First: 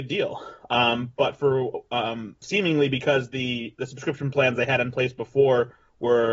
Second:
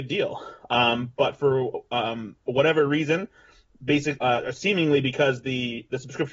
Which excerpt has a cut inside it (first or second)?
first